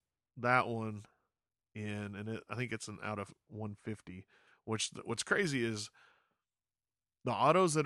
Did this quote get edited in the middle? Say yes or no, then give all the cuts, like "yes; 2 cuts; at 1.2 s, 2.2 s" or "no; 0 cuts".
no; 0 cuts